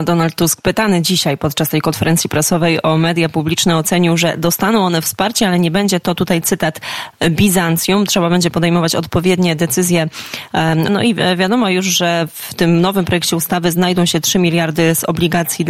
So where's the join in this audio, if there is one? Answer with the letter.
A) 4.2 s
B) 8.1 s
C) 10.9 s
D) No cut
C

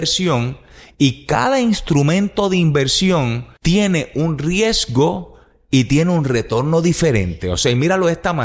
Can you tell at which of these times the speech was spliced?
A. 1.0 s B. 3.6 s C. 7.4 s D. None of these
B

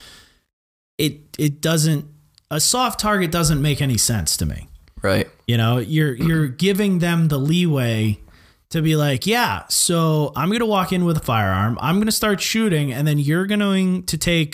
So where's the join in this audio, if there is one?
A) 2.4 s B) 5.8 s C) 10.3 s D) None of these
C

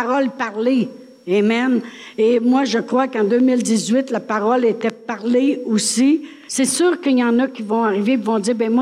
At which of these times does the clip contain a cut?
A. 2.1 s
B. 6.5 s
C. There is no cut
B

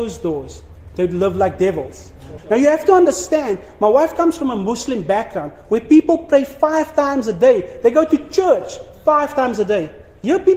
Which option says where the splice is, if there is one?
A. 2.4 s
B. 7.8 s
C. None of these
A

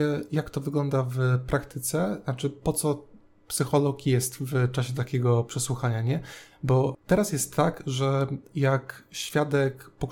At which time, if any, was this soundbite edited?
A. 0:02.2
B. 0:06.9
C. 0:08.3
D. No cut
B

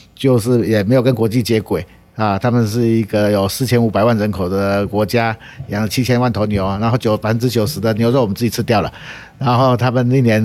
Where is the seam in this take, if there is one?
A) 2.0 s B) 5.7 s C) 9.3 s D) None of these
D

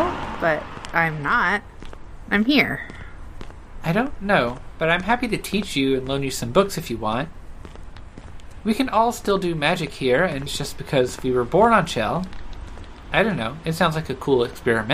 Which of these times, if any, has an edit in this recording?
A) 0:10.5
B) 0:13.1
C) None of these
A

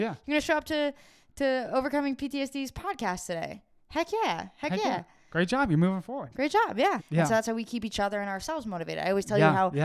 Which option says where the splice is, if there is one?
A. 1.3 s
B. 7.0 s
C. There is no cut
B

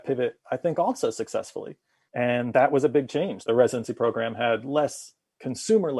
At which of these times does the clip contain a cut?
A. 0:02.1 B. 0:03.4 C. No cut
B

